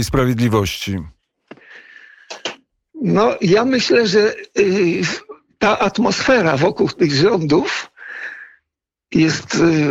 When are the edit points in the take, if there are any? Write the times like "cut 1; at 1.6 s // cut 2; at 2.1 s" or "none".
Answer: none